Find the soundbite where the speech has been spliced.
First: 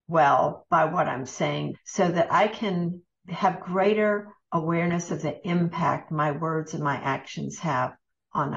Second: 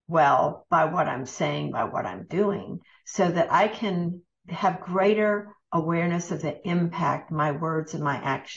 first; 1 cut; at 1.7 s

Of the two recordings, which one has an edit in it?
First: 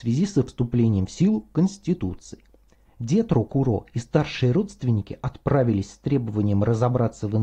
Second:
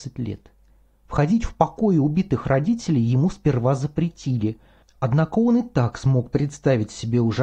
first; 1 cut; at 2.8 s

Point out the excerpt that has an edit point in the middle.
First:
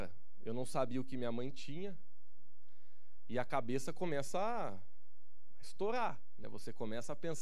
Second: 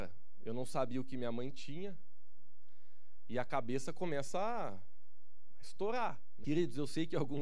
second; 1 cut; at 6.4 s

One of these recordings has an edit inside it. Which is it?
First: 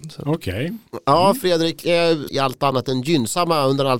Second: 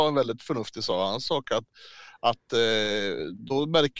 first; 1 cut; at 2.3 s

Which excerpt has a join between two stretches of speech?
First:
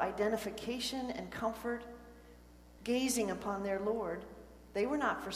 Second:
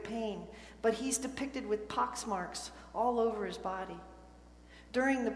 first; 1 cut; at 2.8 s

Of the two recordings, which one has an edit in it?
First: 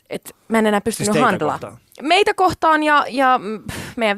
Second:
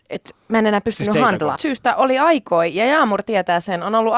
second; 1 cut; at 1.6 s

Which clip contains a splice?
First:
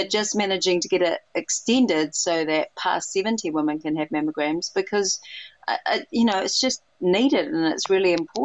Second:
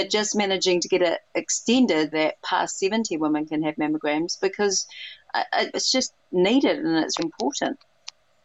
second; 3 cuts; at 2.1 s, 5.7 s, 7.2 s

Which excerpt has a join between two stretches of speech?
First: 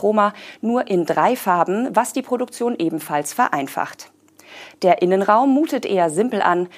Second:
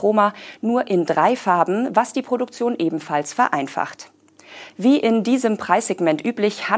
second; 1 cut; at 4.7 s

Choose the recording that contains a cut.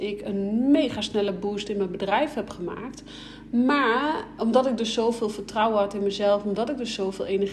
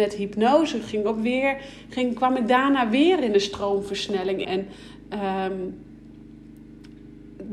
second; 1 cut; at 4.4 s

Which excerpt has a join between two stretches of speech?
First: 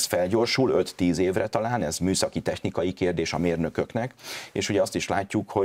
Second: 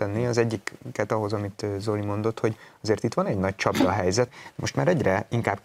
second; 1 cut; at 4.3 s

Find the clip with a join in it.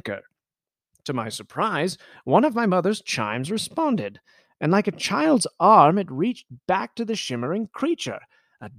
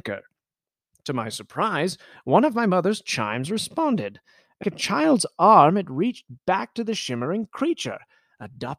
second; 1 cut; at 4.6 s

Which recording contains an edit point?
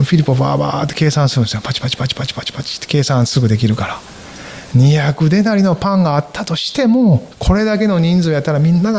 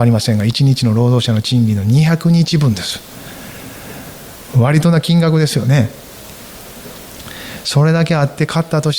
first; 1 cut; at 7.3 s

